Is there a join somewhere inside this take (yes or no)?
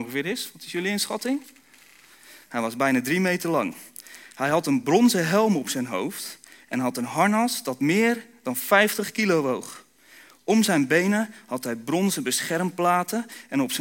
no